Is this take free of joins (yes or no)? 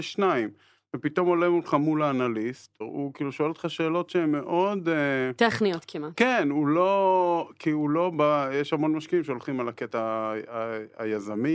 no